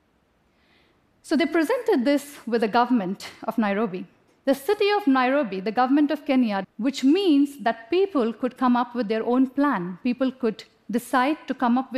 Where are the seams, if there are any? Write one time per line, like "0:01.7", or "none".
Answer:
0:04.3
0:06.6